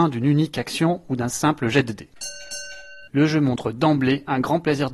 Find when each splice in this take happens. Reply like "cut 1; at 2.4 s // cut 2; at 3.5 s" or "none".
cut 1; at 3.1 s